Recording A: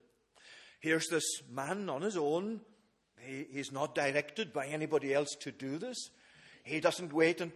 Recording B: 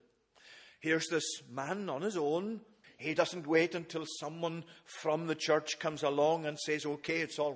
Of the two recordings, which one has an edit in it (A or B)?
B